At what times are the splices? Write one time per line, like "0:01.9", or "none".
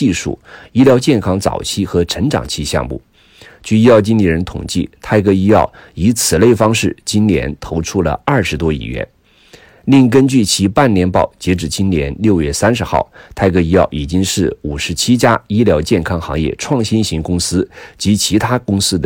none